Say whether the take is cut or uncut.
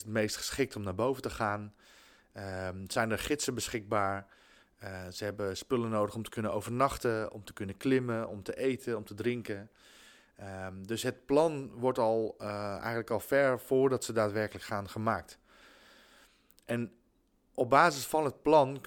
uncut